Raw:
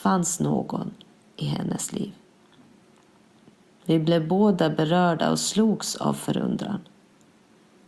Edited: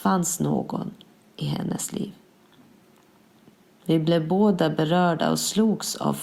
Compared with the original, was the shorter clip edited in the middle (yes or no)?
no